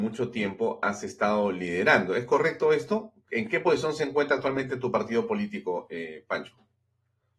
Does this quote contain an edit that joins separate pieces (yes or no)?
no